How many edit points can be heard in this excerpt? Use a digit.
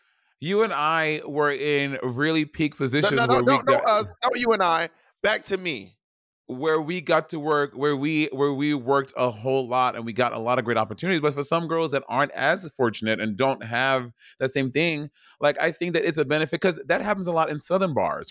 0